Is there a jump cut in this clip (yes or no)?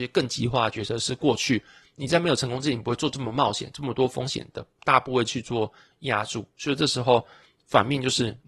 no